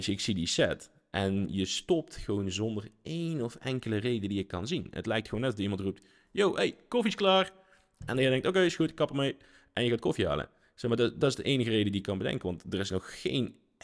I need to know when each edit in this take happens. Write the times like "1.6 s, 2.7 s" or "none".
none